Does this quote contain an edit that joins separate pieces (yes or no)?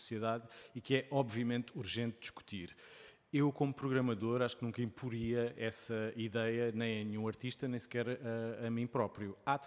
no